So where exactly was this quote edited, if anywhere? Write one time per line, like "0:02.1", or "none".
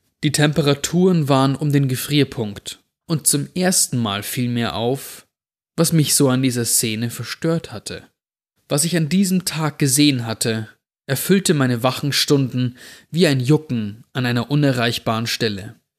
0:08.6

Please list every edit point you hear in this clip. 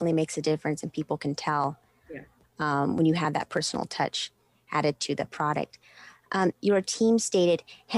0:06.5

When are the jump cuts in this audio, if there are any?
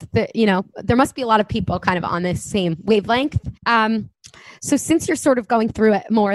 0:03.6

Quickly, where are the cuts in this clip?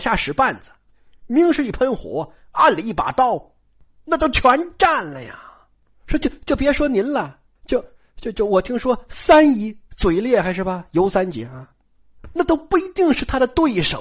none

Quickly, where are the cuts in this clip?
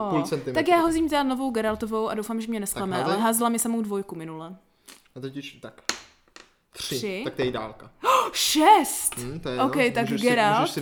none

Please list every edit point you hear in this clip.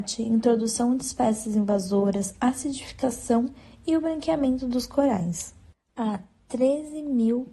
0:05.9

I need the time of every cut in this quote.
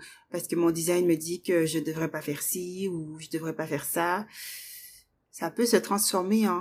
0:05.3

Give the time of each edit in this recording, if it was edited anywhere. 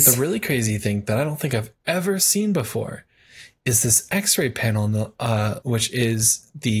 0:05.6

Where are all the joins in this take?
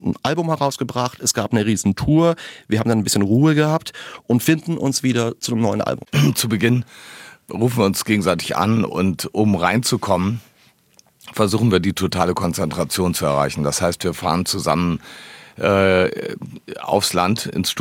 none

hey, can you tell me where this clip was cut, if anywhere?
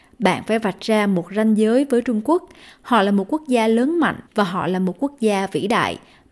0:04.3

